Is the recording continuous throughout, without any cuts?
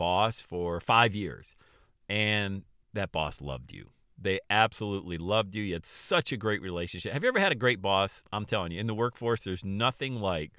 yes; 0 cuts

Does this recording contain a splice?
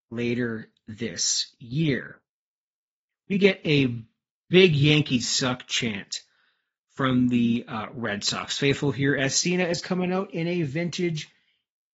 no; 0 cuts

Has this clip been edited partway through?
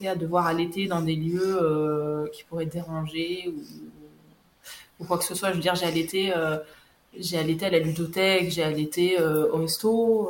no; 0 cuts

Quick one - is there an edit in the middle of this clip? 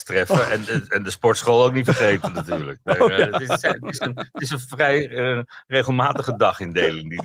no; 0 cuts

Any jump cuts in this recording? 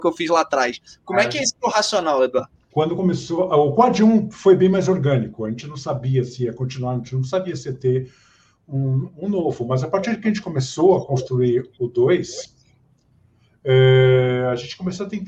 no; 0 cuts

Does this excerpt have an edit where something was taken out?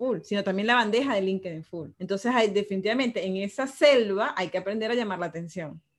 yes; 1 cut; at 1.9 s

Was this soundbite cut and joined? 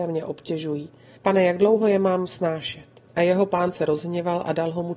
yes; 2 cuts; at 1.2 s, 3.0 s

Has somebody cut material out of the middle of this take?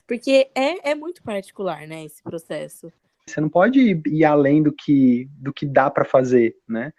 yes; 1 cut; at 3.3 s

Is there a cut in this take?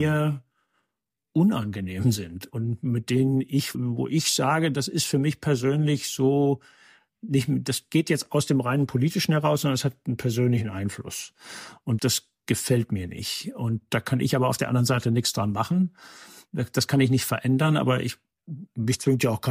yes; 2 cuts; at 3.7 s, 12.0 s

